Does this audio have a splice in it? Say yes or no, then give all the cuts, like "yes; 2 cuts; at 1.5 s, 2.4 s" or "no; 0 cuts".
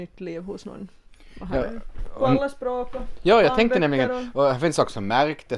no; 0 cuts